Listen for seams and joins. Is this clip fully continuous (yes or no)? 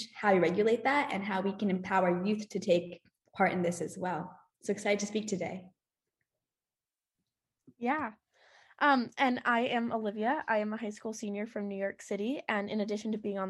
yes